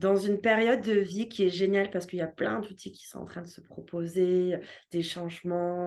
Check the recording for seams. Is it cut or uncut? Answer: uncut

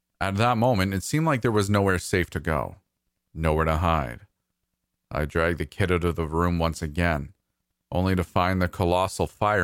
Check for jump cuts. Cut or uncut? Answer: uncut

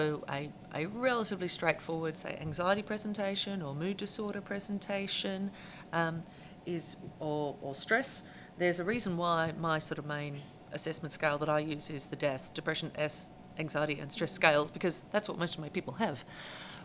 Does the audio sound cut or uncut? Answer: uncut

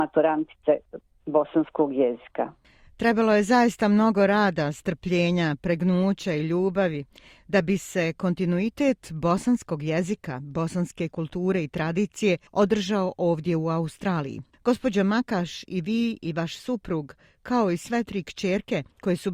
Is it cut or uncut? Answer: uncut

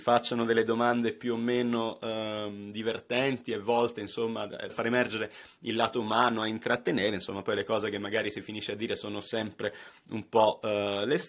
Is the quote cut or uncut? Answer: uncut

